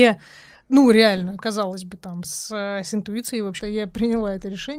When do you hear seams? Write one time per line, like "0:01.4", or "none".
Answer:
0:01.4
0:03.6